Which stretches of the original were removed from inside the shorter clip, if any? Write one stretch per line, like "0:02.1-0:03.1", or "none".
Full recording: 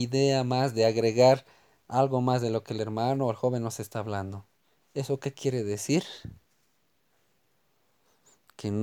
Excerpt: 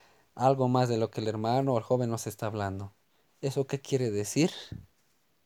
none